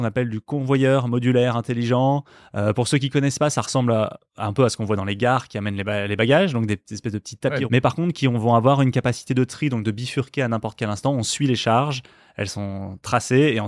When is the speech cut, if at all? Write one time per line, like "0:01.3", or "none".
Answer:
0:07.7

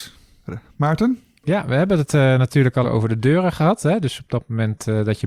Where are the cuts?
0:02.8

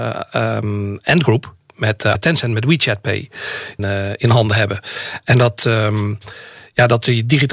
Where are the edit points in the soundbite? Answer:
0:02.1
0:03.8

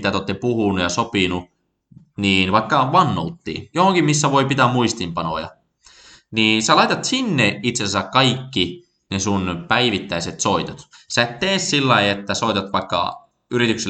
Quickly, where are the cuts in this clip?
none

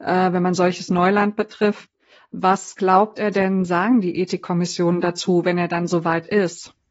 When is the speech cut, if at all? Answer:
none

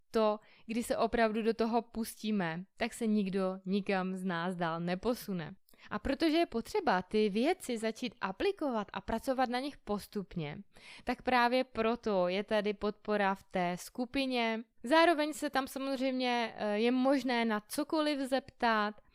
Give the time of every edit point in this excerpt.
0:14.7

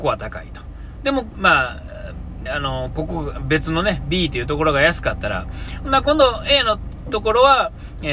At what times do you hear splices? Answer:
0:01.3
0:02.5

